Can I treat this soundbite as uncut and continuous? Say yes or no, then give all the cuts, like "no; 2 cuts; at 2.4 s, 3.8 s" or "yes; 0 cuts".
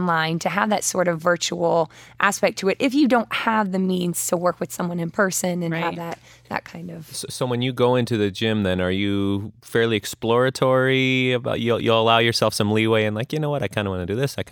yes; 0 cuts